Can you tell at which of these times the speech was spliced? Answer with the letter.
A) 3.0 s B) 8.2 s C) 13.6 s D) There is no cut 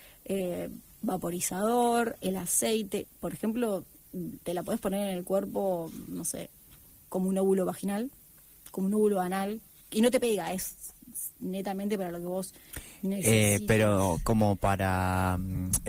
A